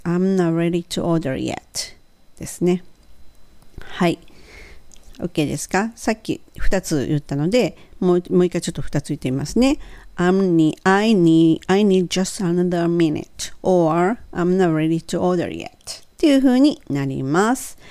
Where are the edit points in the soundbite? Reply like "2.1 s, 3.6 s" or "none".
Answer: 16.1 s